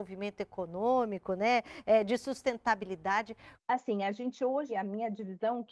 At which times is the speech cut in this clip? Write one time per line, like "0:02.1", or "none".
0:03.6
0:04.7